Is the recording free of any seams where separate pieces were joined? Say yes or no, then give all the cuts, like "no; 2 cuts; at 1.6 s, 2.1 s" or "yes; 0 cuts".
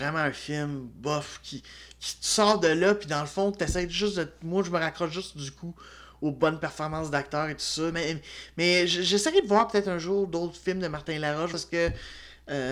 no; 2 cuts; at 7.9 s, 11.5 s